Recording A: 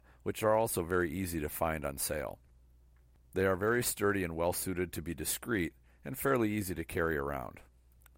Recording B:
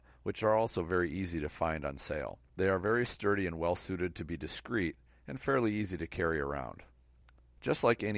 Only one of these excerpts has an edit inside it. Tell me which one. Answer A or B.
B